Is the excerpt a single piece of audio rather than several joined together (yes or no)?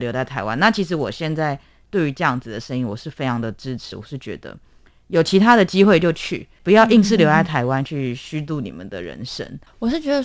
yes